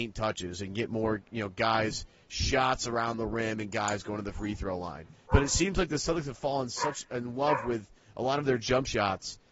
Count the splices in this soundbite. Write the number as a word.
one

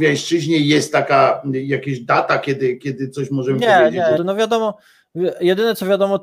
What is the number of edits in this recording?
one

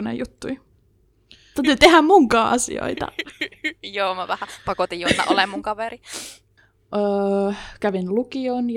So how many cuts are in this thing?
one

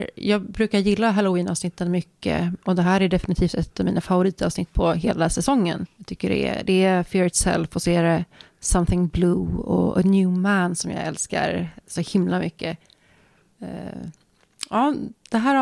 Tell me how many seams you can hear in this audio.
one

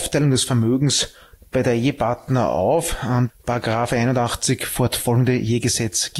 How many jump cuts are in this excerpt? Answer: one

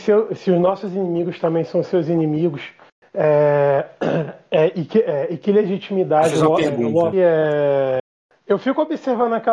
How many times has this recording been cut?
one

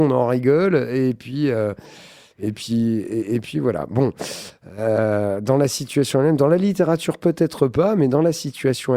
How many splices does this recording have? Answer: zero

